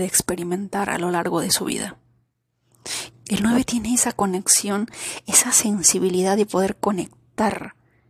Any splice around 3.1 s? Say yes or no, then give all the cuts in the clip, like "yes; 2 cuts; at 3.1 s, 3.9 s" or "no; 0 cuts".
yes; 1 cut; at 3.1 s